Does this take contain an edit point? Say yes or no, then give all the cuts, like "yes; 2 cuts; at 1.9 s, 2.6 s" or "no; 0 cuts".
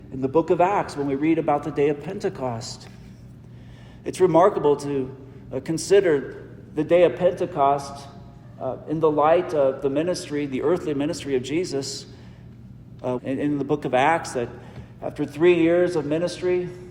yes; 1 cut; at 13.2 s